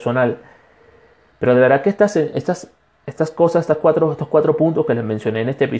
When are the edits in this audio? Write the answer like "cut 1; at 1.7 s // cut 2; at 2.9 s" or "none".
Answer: none

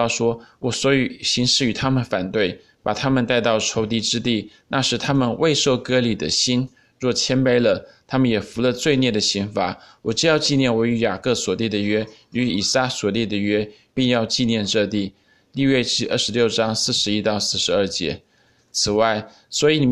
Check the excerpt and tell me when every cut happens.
cut 1; at 13.9 s

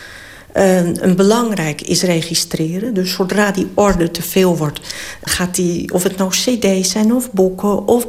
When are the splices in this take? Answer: cut 1; at 5.3 s

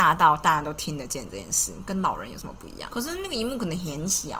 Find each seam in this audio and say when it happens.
cut 1; at 2.9 s

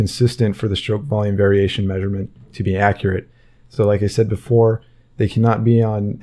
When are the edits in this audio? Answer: none

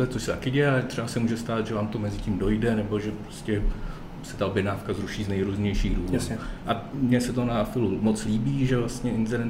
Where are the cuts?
none

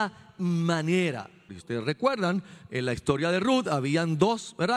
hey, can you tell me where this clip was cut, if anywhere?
cut 1; at 1.5 s

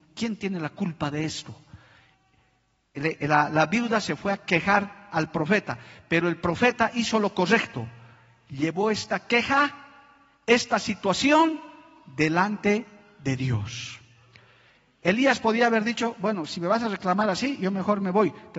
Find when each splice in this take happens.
none

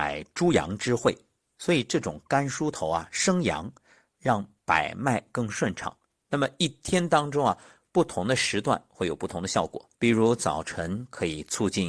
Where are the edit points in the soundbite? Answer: cut 1; at 6.2 s // cut 2; at 9.9 s

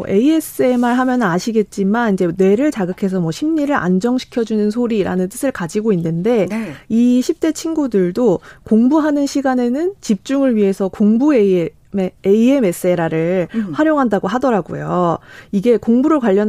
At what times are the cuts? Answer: none

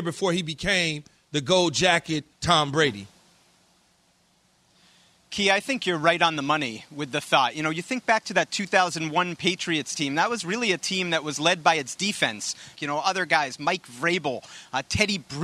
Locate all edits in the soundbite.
cut 1; at 2.3 s // cut 2; at 12.7 s

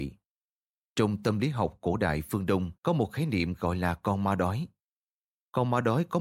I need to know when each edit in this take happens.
cut 1; at 2.8 s

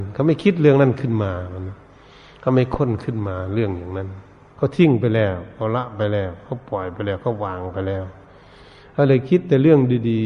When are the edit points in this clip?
none

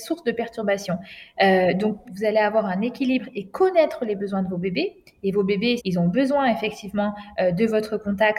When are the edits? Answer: cut 1; at 2.0 s // cut 2; at 5.8 s

